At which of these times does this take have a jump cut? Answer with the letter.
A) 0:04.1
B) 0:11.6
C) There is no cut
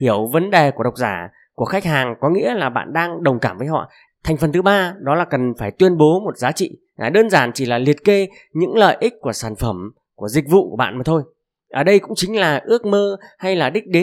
A